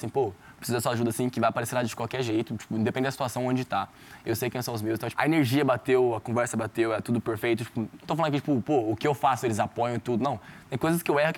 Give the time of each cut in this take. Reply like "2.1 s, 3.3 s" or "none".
5.1 s